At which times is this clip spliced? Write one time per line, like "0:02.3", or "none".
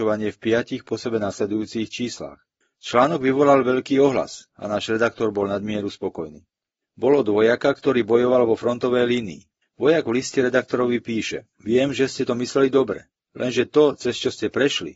0:06.8
0:09.7
0:11.5